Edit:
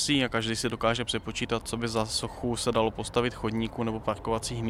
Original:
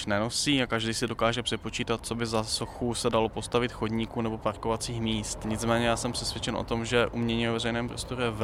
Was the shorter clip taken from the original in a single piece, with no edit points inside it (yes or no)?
yes